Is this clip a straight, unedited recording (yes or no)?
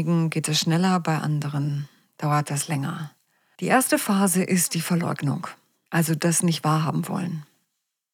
yes